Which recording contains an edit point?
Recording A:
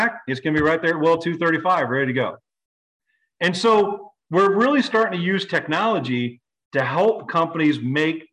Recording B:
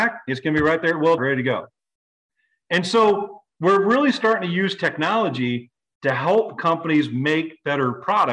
B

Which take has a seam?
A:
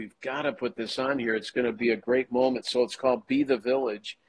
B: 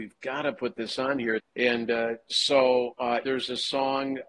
B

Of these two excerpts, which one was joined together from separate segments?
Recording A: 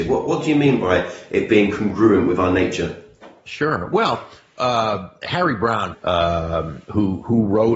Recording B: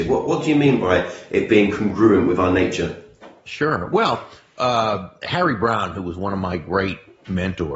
A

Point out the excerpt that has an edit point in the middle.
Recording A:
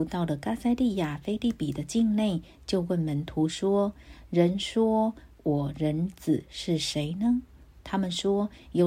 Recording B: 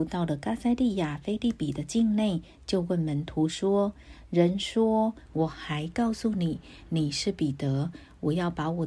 B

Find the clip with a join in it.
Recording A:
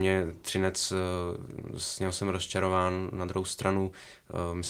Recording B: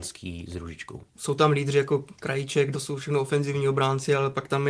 B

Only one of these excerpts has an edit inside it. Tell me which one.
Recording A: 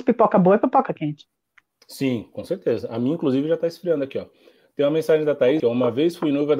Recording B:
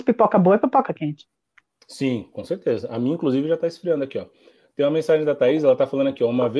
A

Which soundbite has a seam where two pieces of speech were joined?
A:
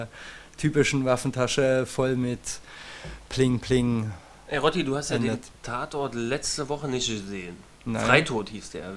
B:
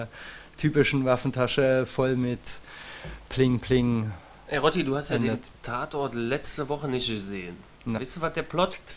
B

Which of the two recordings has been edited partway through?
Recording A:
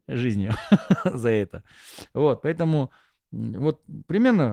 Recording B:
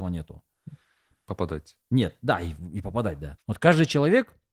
B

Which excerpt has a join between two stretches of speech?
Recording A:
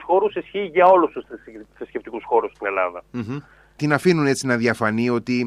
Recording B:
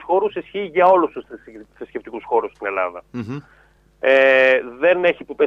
A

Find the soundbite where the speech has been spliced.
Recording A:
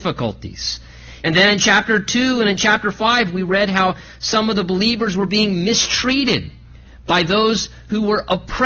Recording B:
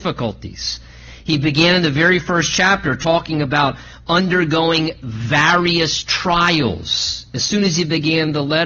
A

